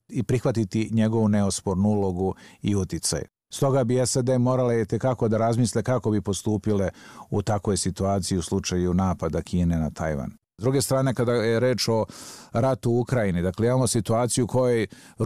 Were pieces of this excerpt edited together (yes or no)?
no